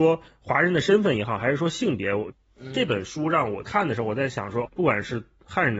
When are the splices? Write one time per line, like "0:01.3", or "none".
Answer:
0:04.6